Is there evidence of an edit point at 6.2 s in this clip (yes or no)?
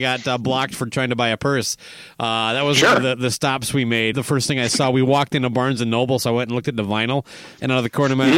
no